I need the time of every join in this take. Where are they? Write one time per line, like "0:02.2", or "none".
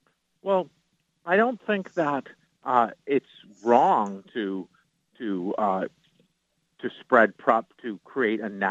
none